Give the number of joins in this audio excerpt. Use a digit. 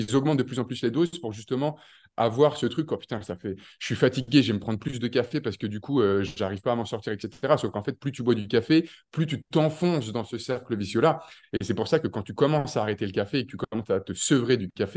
0